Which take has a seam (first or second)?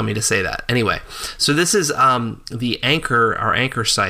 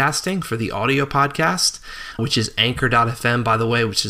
second